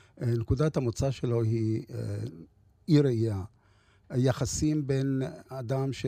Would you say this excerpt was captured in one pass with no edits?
yes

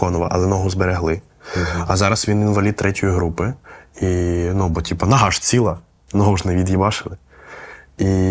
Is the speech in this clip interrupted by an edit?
no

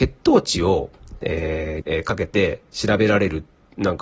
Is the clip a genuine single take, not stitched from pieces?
no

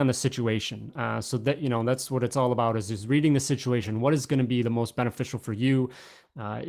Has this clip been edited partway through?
no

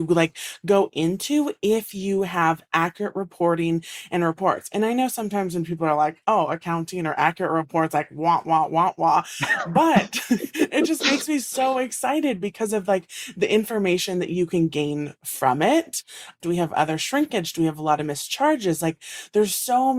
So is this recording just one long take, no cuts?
no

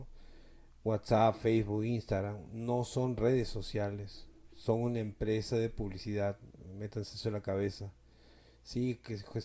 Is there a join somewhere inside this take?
no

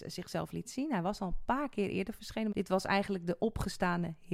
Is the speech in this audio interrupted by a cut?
yes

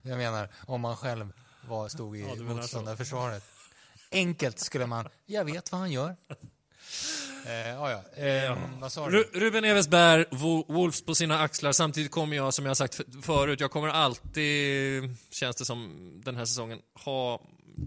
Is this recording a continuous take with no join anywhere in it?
yes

